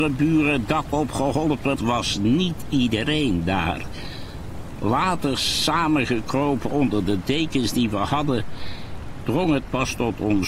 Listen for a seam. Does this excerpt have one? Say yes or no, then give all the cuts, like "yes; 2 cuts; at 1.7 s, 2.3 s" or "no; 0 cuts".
yes; 1 cut; at 1.7 s